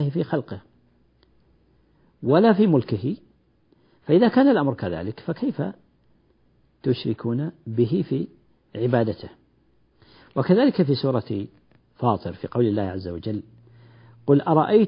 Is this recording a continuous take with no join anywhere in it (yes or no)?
yes